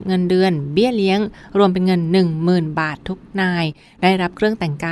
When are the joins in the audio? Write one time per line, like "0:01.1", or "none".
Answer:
0:03.0